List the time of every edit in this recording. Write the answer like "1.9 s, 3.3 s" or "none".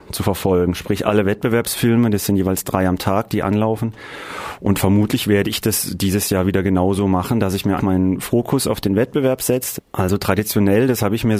7.8 s, 9.8 s